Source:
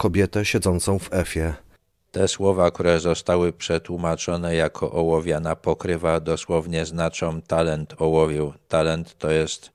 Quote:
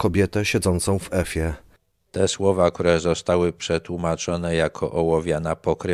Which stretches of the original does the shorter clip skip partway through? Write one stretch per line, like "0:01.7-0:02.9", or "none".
none